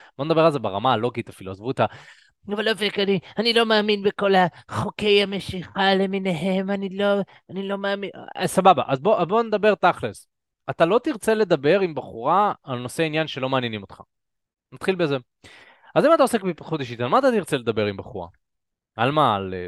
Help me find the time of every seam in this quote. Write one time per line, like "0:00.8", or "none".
none